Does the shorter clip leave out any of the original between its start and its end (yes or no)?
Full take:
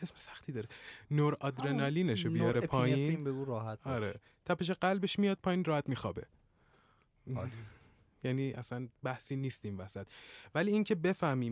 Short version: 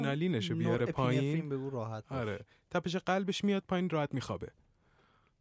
no